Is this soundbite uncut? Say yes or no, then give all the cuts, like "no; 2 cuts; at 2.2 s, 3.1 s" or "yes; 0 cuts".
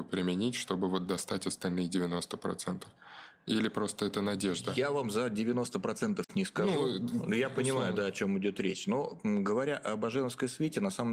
yes; 0 cuts